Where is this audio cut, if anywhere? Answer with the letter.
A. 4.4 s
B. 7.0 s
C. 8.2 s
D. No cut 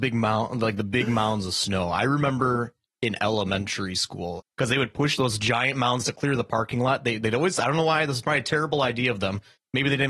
A